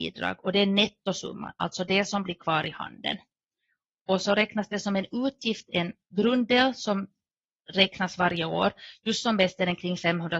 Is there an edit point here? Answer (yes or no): no